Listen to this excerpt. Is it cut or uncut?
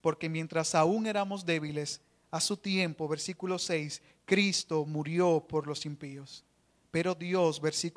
uncut